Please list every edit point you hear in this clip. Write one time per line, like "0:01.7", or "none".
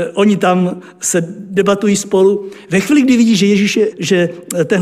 0:03.9